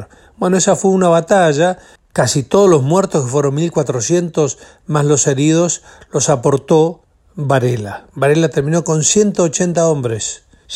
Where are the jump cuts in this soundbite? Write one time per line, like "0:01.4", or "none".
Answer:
0:02.0